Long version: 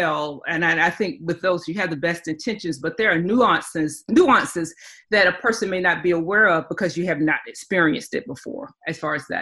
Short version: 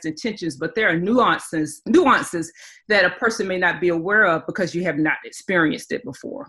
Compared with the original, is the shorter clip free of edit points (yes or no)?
yes